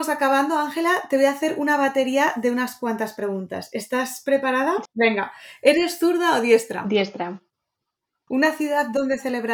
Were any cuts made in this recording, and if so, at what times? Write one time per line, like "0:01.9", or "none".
0:04.9
0:08.3